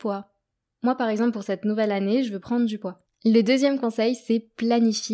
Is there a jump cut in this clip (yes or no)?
yes